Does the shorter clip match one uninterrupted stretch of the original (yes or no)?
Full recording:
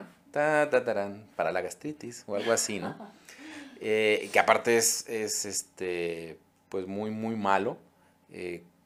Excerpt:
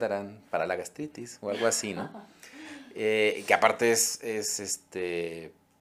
yes